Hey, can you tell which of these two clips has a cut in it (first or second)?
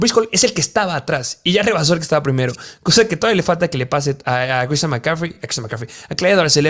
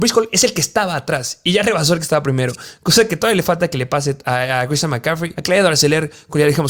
second